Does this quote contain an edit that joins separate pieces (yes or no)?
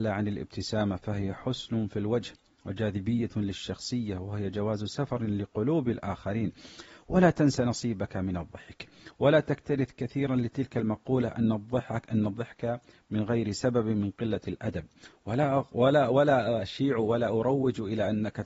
no